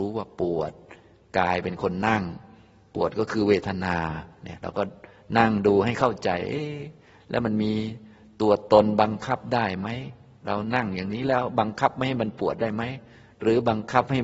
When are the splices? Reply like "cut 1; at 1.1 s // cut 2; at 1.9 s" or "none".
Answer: none

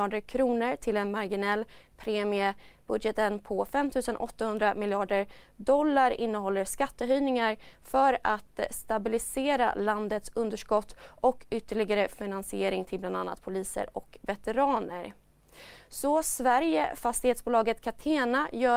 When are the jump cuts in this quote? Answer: cut 1; at 2.8 s

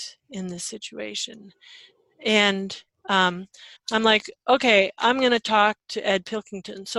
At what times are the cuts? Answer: cut 1; at 3.8 s

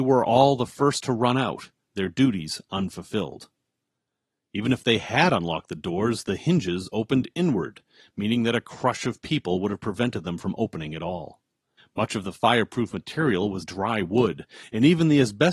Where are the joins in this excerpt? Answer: cut 1; at 11.8 s // cut 2; at 13.6 s

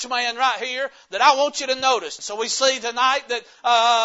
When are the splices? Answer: cut 1; at 2.2 s

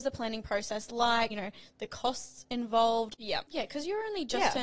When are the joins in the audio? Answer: cut 1; at 1.3 s // cut 2; at 3.5 s

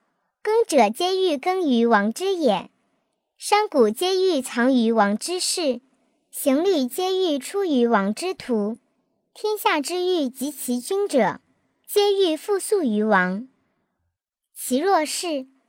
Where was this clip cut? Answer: none

